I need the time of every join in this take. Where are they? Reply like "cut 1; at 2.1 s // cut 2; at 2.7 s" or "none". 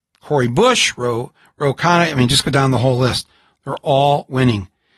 none